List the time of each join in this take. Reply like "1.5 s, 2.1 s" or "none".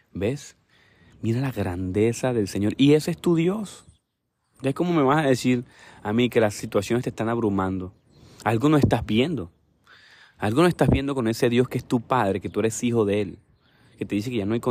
none